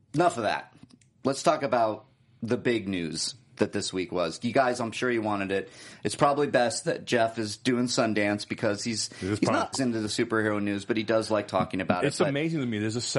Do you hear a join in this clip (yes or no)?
yes